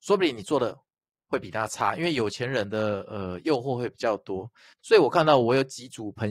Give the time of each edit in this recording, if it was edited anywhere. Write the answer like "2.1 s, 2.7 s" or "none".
none